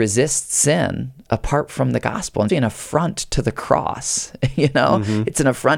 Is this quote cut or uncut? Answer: cut